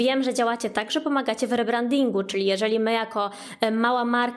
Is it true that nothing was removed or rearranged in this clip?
yes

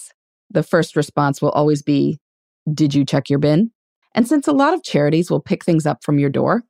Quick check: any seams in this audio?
yes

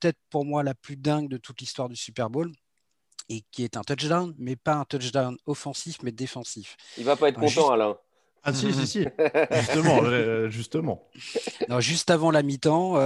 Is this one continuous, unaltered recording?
yes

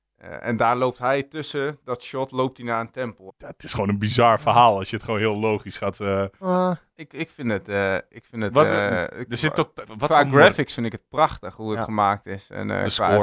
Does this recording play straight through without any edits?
no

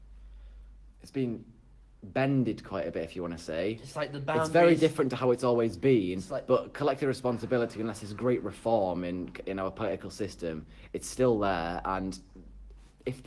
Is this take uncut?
yes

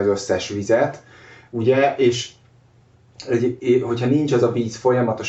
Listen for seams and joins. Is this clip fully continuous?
yes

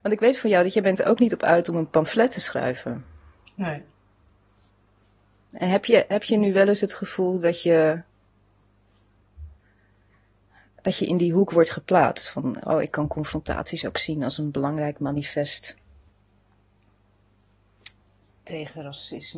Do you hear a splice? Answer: no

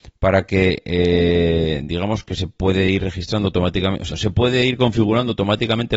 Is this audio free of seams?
no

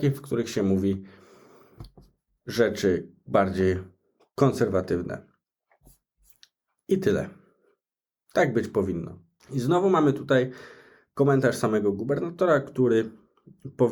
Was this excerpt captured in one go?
no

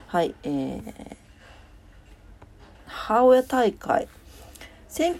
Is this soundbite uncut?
no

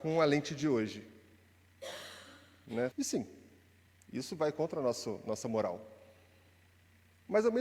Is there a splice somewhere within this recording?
yes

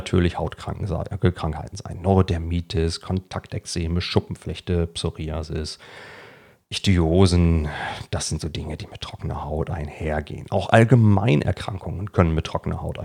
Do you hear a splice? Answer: no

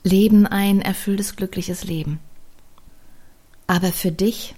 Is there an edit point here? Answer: no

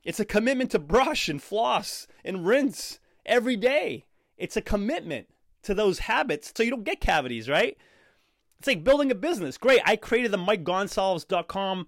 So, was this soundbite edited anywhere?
yes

